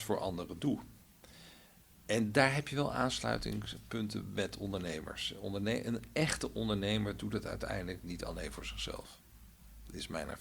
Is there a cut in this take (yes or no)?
no